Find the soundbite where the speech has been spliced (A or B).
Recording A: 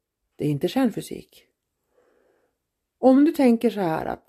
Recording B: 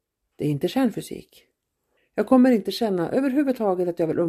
B